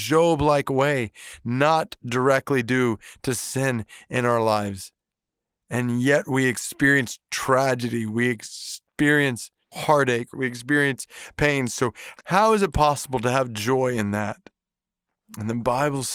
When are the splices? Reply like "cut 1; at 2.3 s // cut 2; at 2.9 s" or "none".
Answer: cut 1; at 10.3 s